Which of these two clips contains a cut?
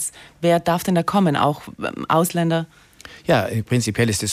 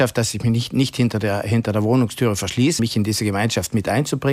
second; 1 cut; at 2.8 s

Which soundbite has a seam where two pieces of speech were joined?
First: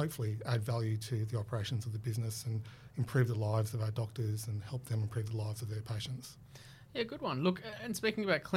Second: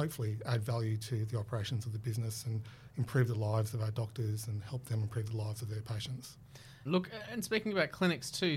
second; 1 cut; at 6.8 s

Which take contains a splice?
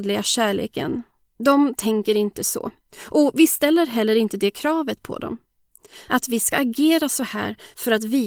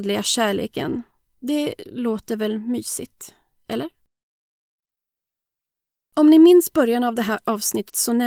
first; 2 cuts; at 1.2 s, 6.1 s

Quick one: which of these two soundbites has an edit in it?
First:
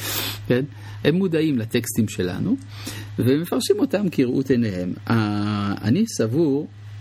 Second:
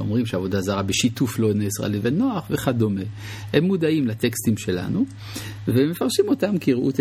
first; 1 cut; at 1.0 s

